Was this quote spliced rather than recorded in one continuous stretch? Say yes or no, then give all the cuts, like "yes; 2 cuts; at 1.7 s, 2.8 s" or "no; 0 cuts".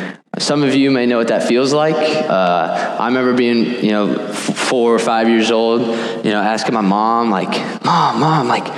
yes; 1 cut; at 2.3 s